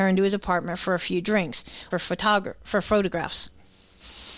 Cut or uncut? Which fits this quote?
cut